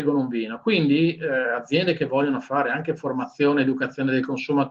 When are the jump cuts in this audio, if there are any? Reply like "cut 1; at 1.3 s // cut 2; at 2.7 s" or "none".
none